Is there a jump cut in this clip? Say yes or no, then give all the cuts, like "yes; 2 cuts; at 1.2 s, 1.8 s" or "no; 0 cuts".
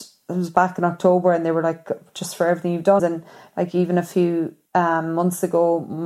yes; 2 cuts; at 3.0 s, 4.7 s